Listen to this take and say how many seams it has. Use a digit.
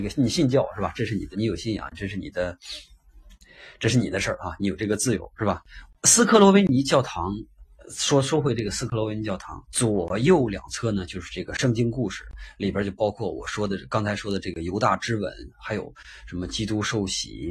3